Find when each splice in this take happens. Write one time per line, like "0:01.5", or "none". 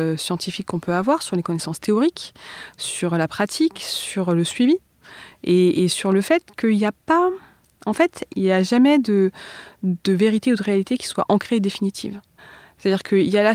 none